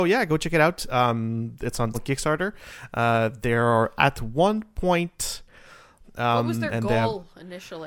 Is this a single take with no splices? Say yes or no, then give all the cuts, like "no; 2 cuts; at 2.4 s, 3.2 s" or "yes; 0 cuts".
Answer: no; 2 cuts; at 1.9 s, 6.0 s